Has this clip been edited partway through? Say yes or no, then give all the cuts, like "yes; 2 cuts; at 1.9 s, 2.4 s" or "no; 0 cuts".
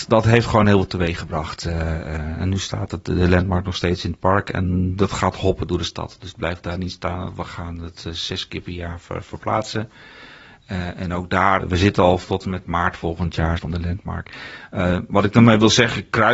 yes; 2 cuts; at 11.6 s, 13.6 s